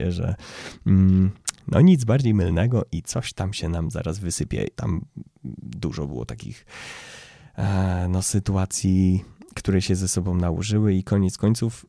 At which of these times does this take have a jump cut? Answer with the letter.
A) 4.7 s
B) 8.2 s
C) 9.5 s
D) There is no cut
A